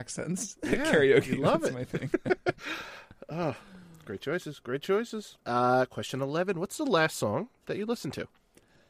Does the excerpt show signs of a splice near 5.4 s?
yes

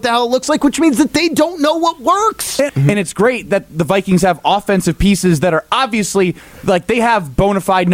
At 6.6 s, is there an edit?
no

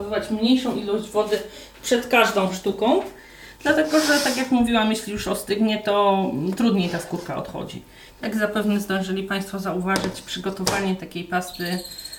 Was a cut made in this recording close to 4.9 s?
no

